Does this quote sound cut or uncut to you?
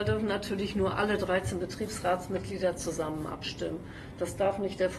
uncut